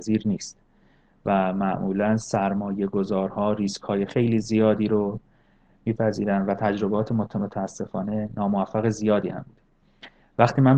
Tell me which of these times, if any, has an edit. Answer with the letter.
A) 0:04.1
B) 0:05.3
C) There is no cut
A